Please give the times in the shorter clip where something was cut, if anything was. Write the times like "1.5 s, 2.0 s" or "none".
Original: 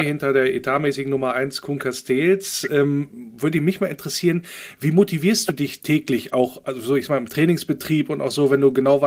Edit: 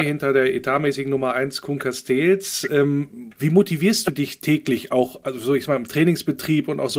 3.3 s

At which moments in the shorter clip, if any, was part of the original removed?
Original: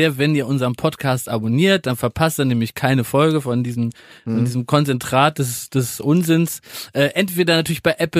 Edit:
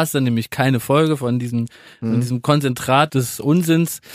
3.1 s

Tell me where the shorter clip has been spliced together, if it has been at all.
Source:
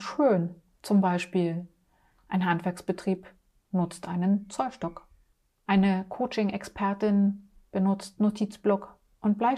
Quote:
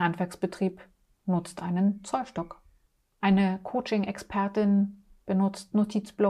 none

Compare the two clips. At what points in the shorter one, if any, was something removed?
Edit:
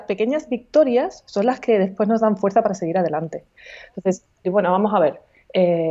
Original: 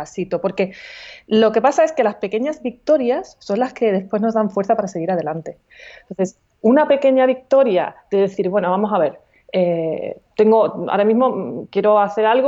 4.4 s

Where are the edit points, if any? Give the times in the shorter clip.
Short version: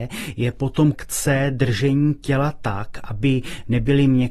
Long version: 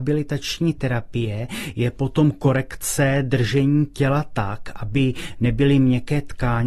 0.9 s

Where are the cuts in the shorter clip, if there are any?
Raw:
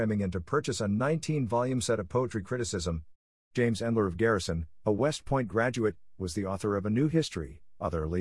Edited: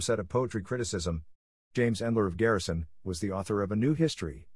3.0 s

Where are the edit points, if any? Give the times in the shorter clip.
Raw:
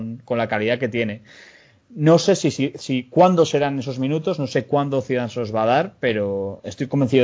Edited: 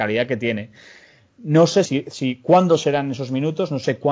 1.9 s

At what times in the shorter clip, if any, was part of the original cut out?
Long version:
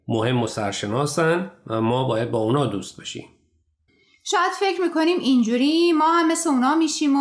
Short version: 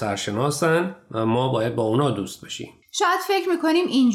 2.8 s

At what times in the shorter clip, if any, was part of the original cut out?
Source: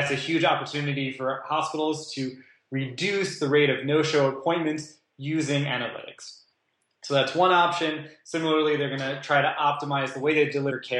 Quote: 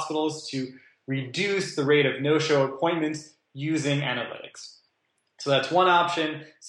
none

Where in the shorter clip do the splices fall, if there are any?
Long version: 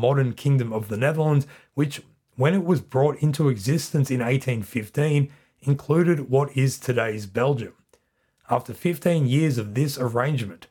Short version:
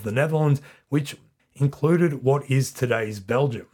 1.4 s

